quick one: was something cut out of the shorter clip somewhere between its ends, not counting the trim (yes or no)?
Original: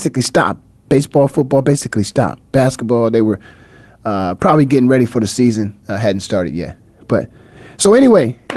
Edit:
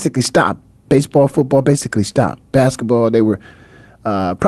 no